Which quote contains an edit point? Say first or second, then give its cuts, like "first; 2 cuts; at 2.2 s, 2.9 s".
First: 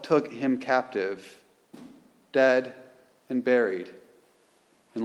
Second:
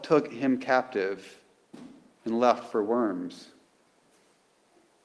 second; 1 cut; at 2.1 s